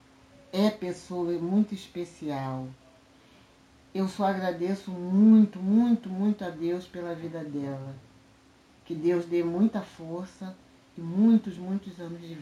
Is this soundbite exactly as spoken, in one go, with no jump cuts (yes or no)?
yes